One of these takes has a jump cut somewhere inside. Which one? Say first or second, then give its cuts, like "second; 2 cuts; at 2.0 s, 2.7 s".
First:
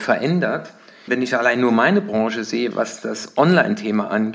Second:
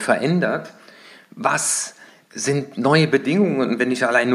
first; 2 cuts; at 1.1 s, 2.7 s